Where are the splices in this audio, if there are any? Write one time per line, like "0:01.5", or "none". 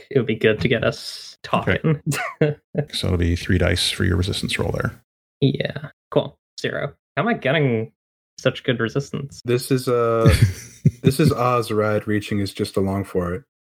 0:02.9